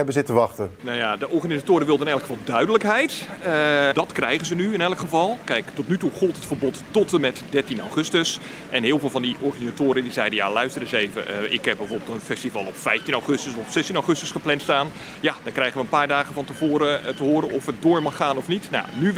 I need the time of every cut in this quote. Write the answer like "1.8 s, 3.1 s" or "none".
3.9 s